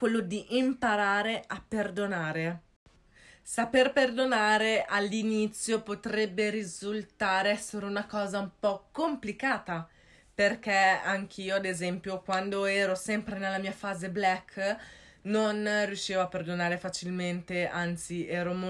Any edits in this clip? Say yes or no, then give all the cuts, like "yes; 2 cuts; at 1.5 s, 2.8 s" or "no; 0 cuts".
no; 0 cuts